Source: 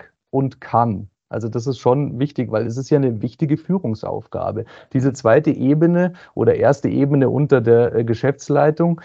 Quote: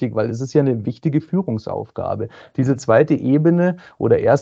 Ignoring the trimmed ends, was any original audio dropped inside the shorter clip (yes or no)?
no